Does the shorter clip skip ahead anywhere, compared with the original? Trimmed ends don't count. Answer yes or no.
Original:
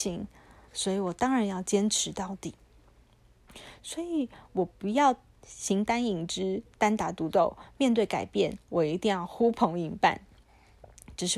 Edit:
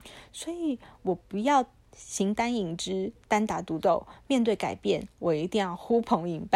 no